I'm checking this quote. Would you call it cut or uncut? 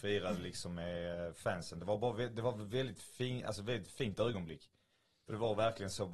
uncut